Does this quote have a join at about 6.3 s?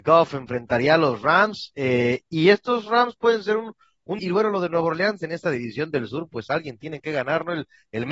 no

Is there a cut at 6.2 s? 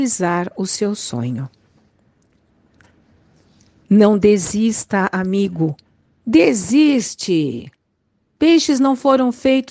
yes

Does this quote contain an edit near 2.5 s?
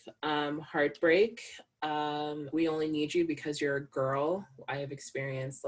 yes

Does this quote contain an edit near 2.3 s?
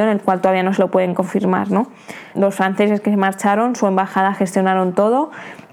yes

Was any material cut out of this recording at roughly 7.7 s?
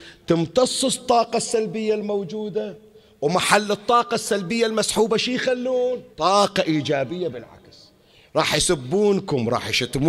no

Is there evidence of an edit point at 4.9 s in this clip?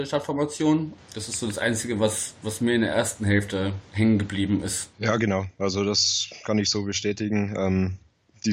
no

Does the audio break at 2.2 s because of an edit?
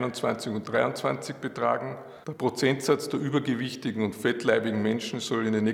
yes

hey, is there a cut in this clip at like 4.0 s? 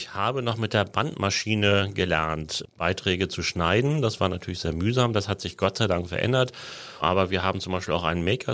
no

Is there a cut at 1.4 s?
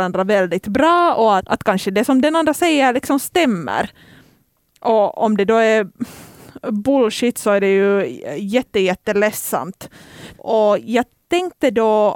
yes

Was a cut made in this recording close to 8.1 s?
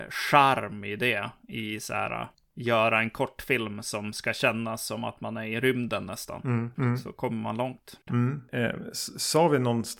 yes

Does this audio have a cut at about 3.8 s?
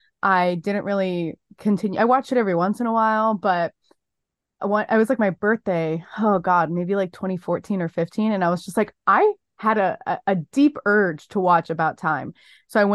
no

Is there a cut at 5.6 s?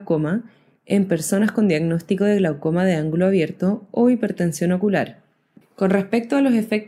yes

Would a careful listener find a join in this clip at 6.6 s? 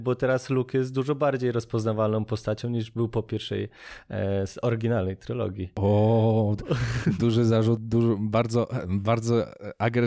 yes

